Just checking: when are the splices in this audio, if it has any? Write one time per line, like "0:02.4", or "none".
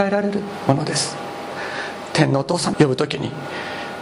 0:02.7

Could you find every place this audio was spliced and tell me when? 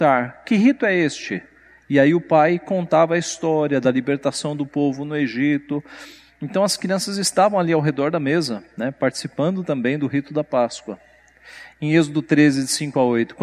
none

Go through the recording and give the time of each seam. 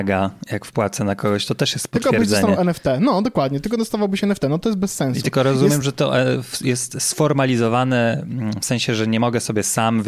none

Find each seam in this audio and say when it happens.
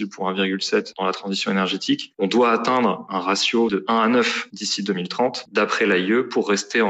none

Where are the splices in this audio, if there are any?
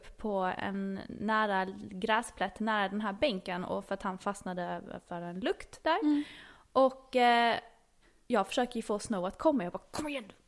none

